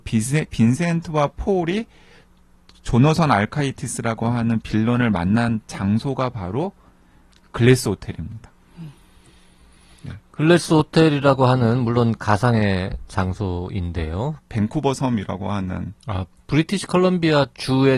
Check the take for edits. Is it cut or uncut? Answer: cut